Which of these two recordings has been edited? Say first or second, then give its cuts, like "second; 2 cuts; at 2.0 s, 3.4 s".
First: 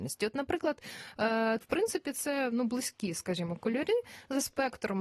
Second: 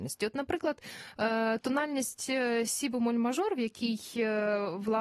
first; 1 cut; at 1.6 s